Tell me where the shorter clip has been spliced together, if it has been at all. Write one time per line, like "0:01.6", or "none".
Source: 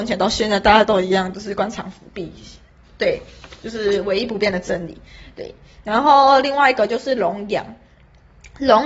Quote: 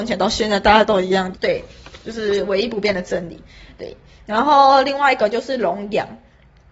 0:01.3

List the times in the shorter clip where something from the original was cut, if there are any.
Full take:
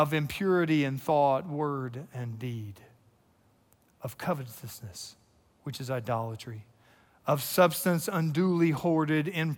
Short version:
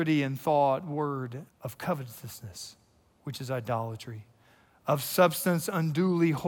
0:01.5

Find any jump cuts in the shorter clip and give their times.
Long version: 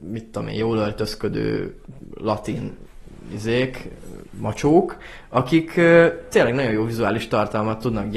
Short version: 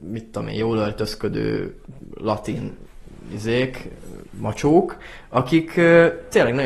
none

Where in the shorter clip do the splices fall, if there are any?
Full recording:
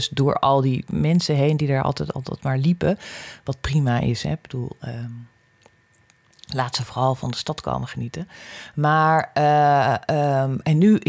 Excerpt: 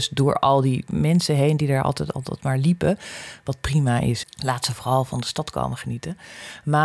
0:04.2

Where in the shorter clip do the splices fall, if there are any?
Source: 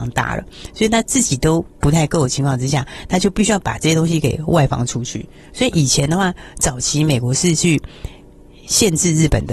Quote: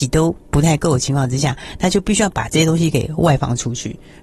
none

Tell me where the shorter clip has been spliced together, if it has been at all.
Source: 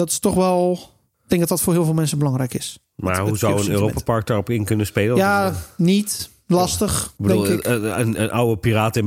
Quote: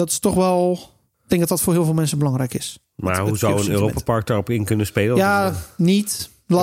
none

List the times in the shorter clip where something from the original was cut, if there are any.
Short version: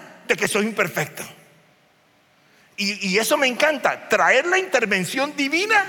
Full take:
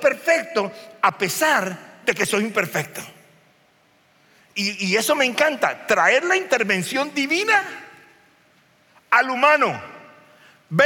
none

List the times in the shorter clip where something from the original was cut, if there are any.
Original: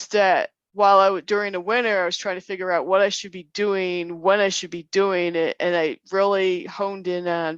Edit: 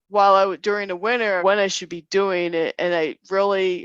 0:01.4

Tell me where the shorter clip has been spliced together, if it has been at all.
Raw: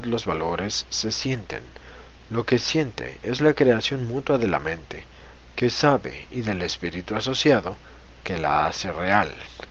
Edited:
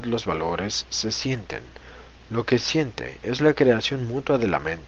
none

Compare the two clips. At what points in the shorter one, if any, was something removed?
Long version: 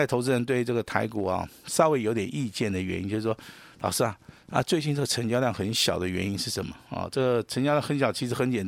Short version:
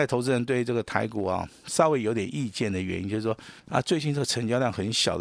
0:03.6

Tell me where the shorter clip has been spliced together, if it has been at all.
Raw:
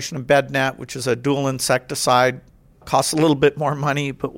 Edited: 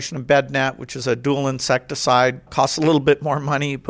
0:02.5

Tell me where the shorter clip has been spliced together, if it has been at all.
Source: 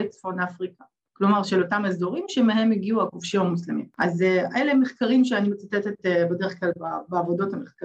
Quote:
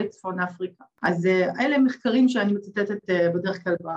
0:00.9

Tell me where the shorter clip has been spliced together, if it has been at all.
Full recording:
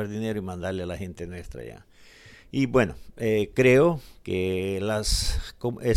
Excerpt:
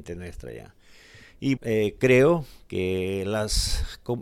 0:01.6

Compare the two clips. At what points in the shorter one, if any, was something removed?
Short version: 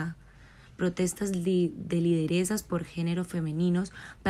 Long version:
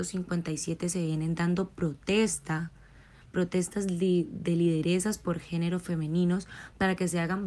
none

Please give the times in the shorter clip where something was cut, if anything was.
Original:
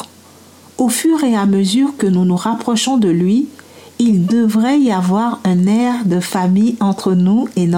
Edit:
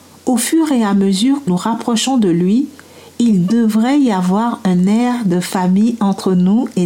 0:01.5

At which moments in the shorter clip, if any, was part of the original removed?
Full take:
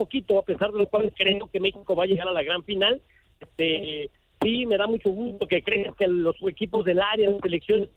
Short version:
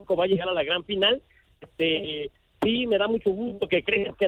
none

